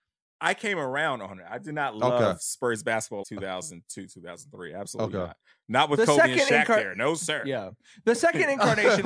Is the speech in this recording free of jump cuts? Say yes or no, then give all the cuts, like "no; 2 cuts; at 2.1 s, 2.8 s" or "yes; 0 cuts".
no; 1 cut; at 3.2 s